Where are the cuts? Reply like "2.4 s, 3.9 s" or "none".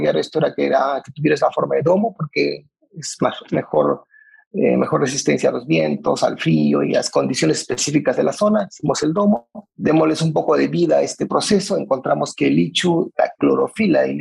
none